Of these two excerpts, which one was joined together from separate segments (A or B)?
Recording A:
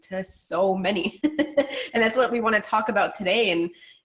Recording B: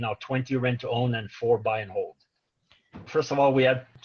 B